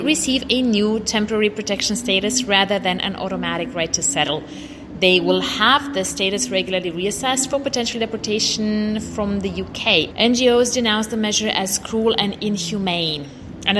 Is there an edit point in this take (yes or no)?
yes